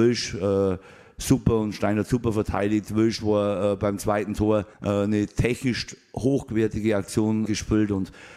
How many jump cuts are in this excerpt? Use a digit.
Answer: 2